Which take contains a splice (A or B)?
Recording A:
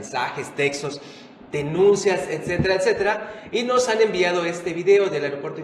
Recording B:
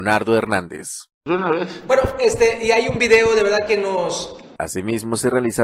B